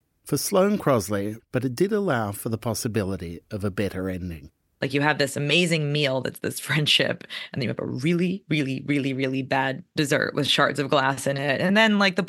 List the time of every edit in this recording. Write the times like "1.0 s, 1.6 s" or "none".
1.4 s

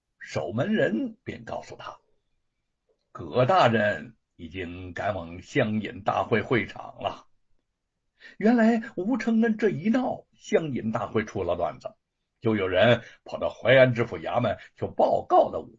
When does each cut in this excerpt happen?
none

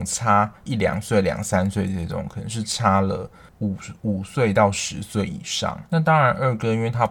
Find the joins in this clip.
5.9 s

